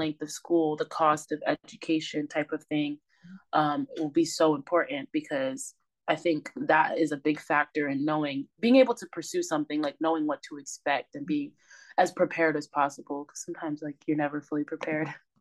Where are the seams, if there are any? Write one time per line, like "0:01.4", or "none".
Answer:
none